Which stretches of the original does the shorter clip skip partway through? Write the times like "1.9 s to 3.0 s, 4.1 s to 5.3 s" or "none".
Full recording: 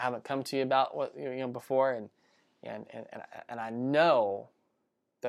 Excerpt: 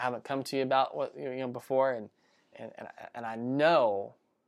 2.5 s to 2.9 s